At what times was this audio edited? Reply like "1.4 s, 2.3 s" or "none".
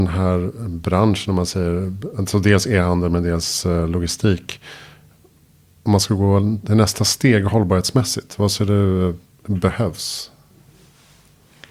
none

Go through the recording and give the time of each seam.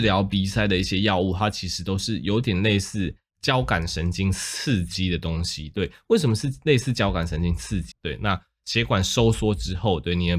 7.9 s

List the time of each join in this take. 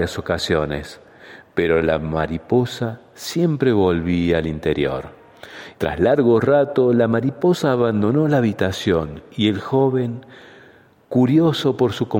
5.7 s

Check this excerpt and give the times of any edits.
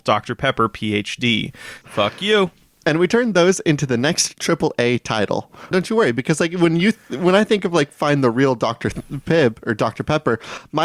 1.8 s, 5.7 s

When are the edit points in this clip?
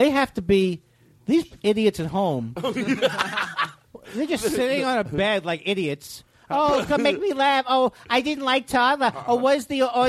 none

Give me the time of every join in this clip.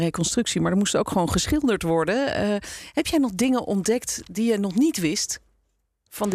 none

